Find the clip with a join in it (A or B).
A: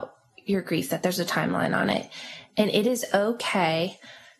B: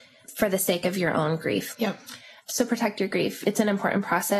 B